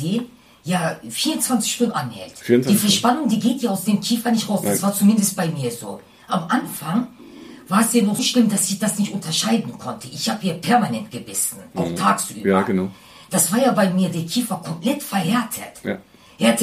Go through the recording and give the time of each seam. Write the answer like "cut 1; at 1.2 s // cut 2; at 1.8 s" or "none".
cut 1; at 8.2 s